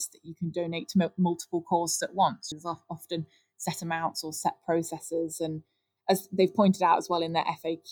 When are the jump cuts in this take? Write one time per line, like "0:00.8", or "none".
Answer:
0:02.5